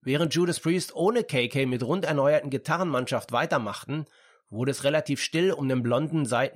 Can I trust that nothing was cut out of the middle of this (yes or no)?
yes